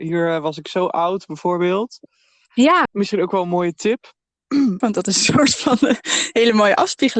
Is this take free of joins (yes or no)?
no